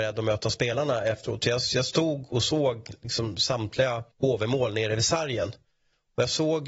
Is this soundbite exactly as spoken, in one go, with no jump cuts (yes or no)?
no